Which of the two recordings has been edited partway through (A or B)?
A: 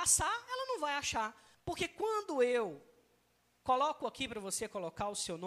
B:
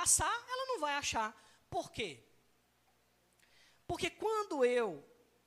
A